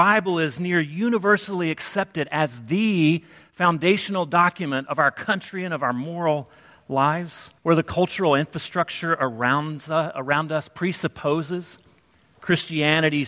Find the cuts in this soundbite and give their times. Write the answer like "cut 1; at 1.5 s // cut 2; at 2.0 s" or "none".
cut 1; at 7.6 s